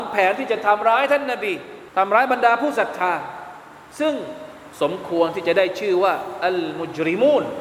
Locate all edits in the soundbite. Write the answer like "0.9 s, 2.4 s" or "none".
1.9 s, 4.7 s